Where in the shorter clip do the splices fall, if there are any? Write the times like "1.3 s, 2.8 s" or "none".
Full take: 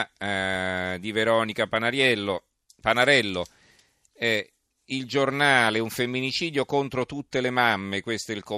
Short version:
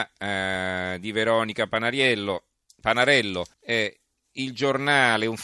3.5 s